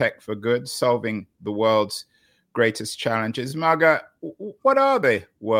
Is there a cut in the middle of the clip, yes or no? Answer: no